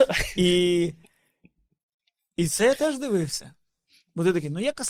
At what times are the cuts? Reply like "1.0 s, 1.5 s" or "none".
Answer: none